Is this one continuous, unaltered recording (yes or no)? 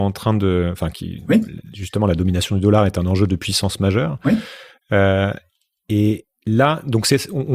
yes